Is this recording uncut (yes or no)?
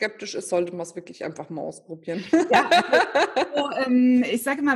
yes